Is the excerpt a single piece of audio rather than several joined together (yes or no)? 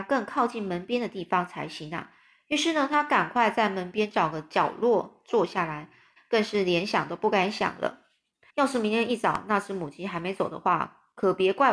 no